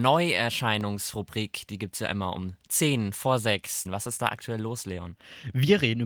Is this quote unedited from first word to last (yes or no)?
no